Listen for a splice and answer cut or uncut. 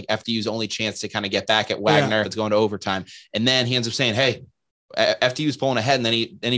cut